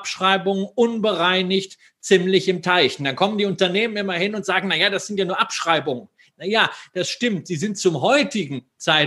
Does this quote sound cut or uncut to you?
cut